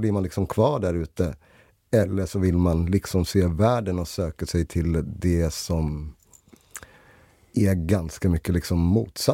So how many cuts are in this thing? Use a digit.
0